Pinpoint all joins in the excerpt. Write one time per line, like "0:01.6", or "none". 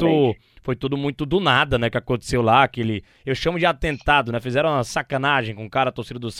none

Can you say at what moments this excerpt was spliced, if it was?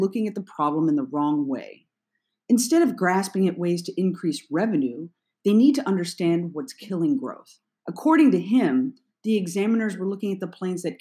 0:07.8

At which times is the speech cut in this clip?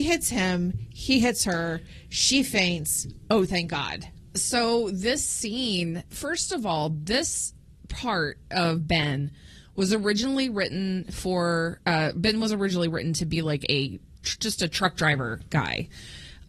0:06.1

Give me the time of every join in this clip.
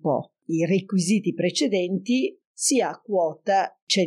0:02.4

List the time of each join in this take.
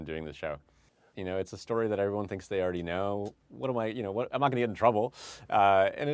0:01.1

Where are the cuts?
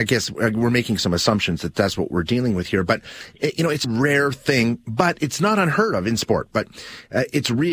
0:03.8
0:06.5

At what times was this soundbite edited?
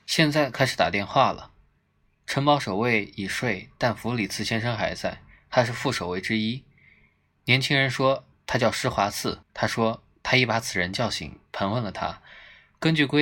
0:09.4

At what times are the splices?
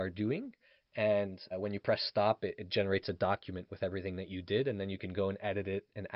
0:01.5

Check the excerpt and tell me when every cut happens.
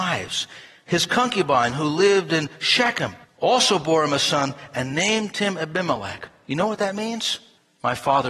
none

